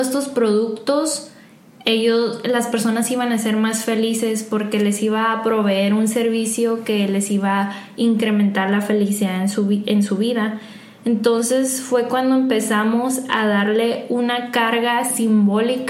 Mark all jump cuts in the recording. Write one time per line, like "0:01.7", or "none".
none